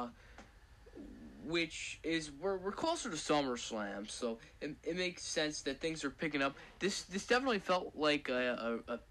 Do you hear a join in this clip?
no; 0 cuts

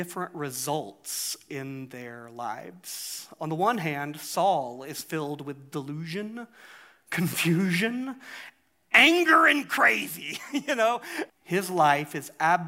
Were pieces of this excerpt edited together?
yes; 1 cut; at 11.3 s

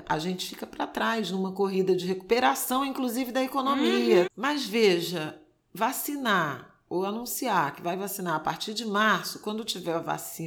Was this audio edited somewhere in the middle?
yes; 1 cut; at 4.3 s

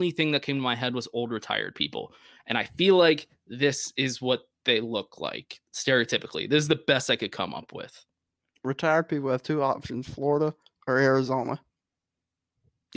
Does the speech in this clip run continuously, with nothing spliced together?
yes; 0 cuts

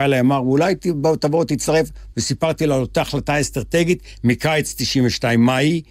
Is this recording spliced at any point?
yes; 1 cut; at 2.1 s

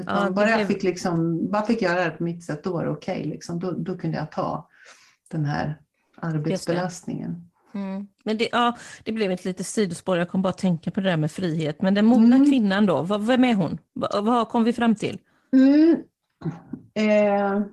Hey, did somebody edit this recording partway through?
no; 0 cuts

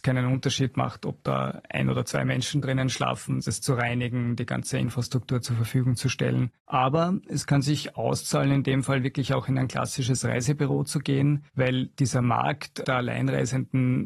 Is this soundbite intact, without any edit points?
yes; 0 cuts

